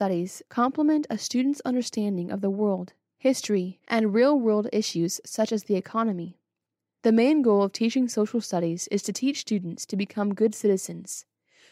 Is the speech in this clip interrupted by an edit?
yes; 1 cut; at 3.8 s

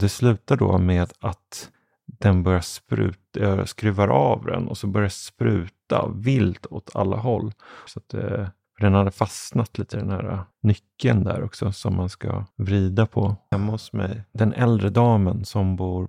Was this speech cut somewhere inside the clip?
yes; 2 cuts; at 7.9 s, 13.5 s

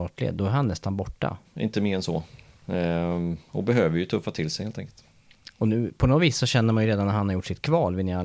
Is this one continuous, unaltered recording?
no; 1 cut; at 1.4 s

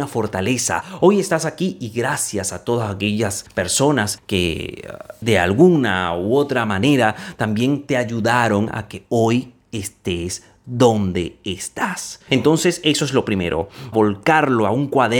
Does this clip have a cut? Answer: yes; 1 cut; at 13.9 s

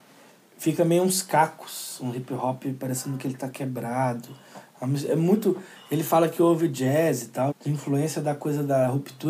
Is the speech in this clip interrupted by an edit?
yes; 1 cut; at 7.5 s

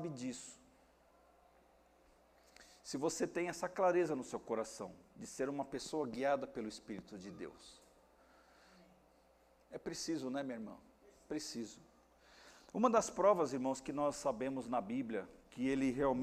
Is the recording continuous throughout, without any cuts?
yes; 0 cuts

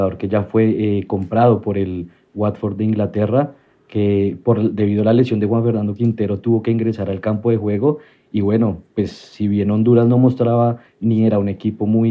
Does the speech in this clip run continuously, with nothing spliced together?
yes; 0 cuts

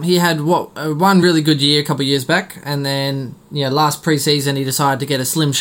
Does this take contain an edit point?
no; 0 cuts

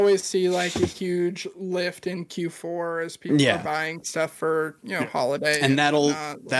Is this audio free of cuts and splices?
yes; 0 cuts

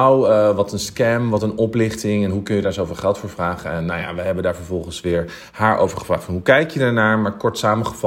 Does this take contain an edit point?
no; 0 cuts

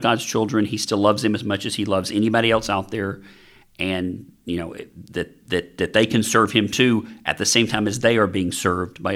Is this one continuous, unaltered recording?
yes; 0 cuts

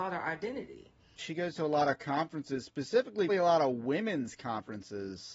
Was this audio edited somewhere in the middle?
yes; 2 cuts; at 1.2 s, 3.3 s

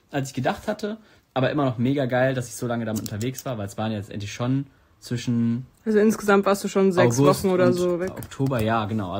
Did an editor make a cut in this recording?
no; 0 cuts

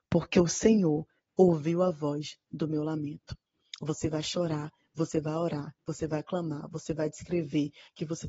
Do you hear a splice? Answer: no; 0 cuts

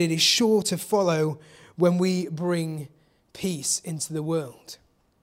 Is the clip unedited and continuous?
yes; 0 cuts

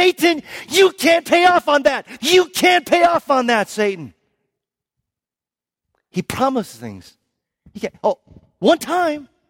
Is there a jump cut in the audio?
yes; 1 cut; at 2.2 s

